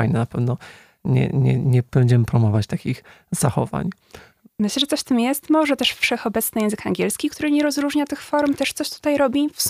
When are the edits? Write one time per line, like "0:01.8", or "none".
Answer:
none